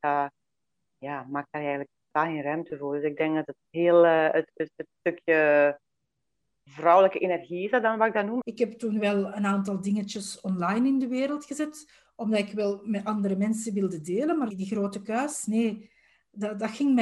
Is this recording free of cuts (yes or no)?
no